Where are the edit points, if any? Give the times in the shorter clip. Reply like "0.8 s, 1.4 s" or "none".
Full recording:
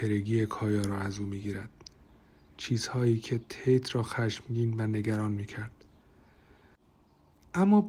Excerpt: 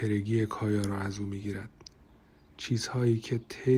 none